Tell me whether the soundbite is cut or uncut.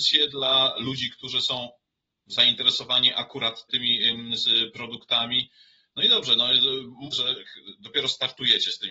cut